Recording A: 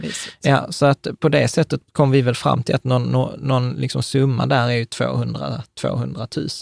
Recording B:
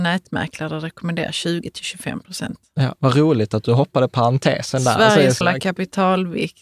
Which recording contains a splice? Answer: B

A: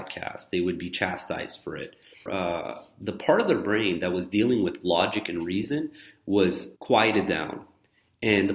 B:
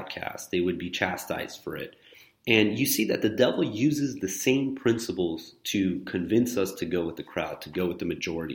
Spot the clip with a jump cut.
A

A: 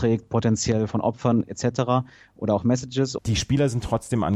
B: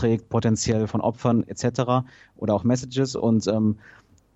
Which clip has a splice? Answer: A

